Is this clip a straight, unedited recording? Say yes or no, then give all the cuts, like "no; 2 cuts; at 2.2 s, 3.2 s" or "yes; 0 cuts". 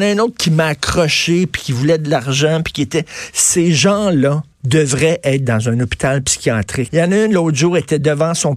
no; 2 cuts; at 4.5 s, 6.9 s